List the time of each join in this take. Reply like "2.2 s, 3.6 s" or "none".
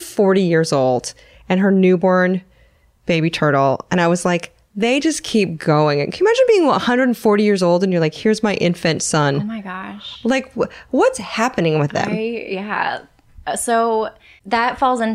none